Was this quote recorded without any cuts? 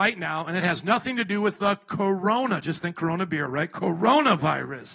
yes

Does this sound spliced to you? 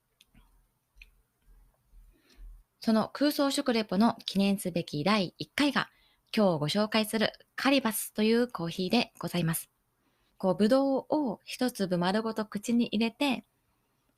yes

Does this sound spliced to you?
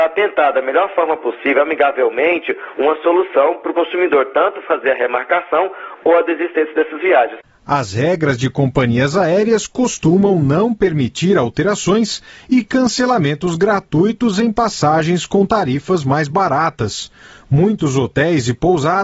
no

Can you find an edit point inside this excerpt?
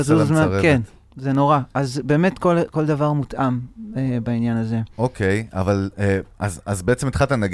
no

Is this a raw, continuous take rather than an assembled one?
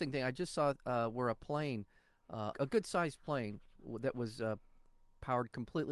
no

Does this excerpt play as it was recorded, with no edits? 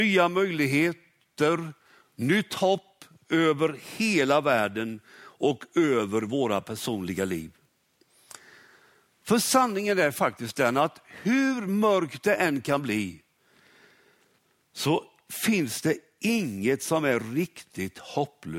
yes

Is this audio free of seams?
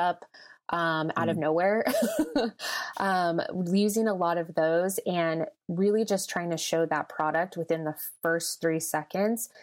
yes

